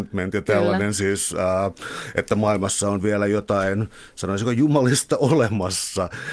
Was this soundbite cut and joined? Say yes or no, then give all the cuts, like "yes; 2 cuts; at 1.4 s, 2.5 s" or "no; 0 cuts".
no; 0 cuts